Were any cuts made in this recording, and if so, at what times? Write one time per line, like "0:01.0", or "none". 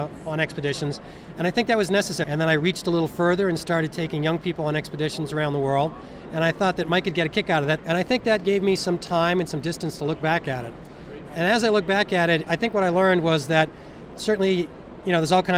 0:02.2
0:07.8